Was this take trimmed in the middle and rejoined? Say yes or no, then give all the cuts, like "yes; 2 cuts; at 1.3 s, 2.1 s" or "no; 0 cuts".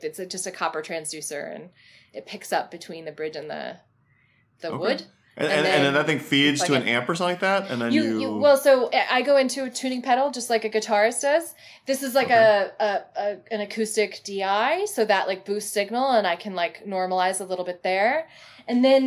no; 0 cuts